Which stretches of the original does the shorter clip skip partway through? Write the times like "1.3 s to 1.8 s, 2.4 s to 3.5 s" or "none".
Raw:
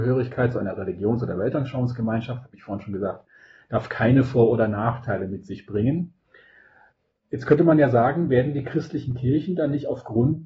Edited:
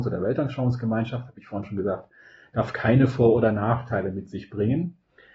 none